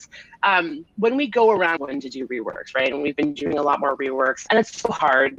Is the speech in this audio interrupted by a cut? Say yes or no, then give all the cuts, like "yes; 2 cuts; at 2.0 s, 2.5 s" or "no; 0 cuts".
yes; 2 cuts; at 1.8 s, 4.5 s